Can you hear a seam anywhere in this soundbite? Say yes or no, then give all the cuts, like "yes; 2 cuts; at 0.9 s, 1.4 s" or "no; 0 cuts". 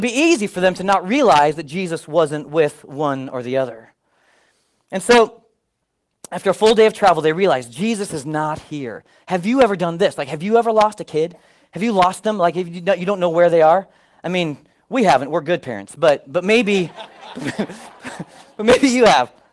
no; 0 cuts